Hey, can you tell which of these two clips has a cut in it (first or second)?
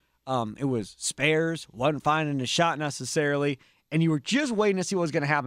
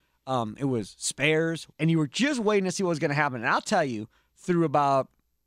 second